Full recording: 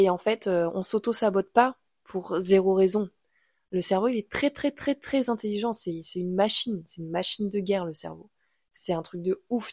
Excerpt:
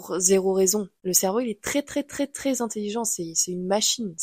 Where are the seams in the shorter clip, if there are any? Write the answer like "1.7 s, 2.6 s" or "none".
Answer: 1.0 s